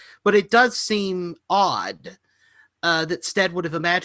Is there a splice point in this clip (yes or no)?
no